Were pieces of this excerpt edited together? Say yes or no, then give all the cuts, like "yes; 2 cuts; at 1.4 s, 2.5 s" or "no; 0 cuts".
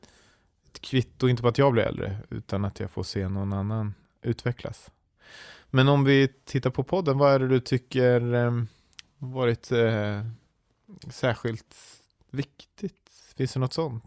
no; 0 cuts